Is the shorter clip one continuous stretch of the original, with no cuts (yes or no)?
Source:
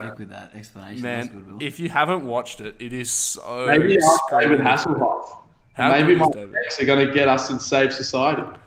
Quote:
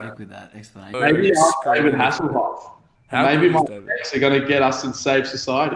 no